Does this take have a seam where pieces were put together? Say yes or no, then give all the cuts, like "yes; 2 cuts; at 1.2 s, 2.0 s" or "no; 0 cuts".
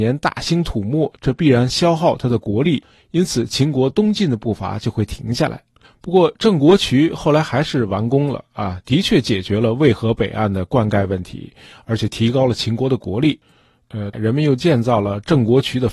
yes; 2 cuts; at 5.8 s, 14.1 s